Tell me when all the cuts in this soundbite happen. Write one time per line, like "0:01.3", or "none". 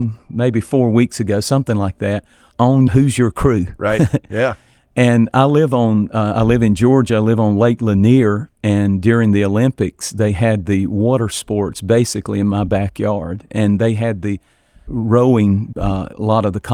none